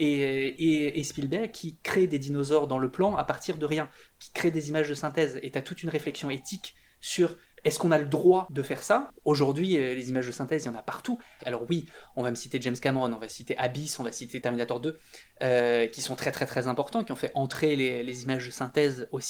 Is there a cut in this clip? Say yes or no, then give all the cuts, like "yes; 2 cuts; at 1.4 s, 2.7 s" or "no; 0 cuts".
yes; 1 cut; at 11.4 s